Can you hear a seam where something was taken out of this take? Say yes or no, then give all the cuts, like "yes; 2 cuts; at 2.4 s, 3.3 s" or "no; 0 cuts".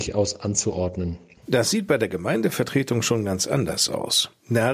yes; 1 cut; at 1.4 s